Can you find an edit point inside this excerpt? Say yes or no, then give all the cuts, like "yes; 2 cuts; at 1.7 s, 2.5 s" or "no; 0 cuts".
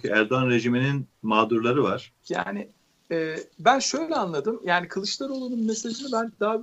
yes; 1 cut; at 2.2 s